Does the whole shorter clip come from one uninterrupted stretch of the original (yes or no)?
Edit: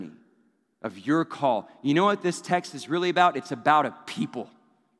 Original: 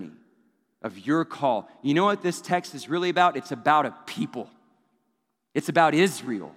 yes